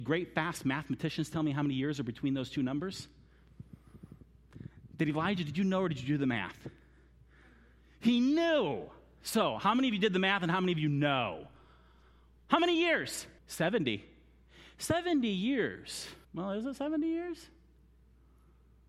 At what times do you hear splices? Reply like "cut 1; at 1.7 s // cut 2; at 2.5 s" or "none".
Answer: cut 1; at 13.4 s // cut 2; at 16.2 s